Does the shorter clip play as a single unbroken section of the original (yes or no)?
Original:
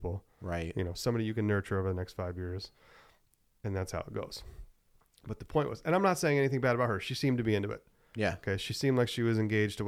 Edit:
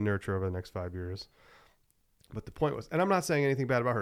no